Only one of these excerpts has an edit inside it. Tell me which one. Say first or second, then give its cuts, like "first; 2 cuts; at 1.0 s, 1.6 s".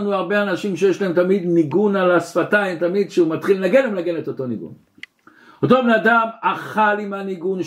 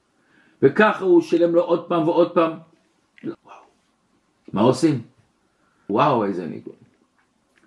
second; 2 cuts; at 3.3 s, 5.9 s